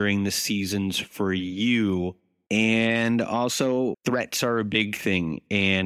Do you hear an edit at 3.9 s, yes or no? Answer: yes